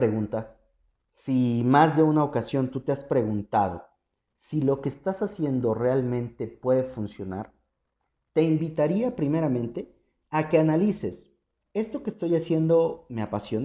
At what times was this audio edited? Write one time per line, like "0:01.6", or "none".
none